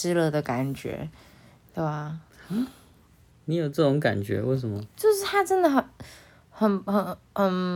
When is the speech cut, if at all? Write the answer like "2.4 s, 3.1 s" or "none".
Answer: none